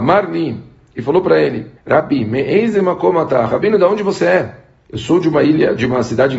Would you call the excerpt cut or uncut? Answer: cut